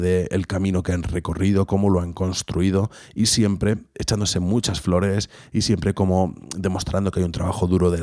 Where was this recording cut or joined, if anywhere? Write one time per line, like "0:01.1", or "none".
0:03.9